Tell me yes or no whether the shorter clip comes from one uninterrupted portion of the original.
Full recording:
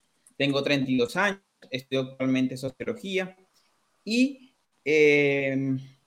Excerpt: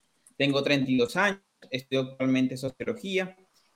yes